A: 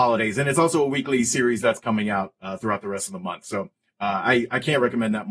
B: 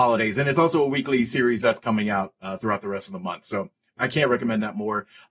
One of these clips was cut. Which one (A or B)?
B